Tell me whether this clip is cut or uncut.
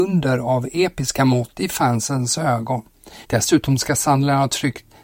cut